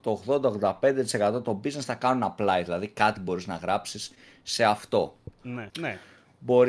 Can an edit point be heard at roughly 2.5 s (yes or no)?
no